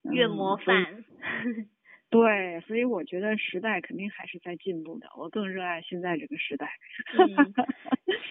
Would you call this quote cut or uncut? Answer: uncut